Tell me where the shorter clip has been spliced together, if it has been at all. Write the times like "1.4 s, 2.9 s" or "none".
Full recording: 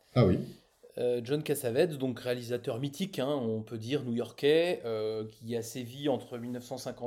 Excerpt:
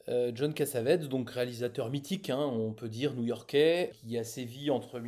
3.9 s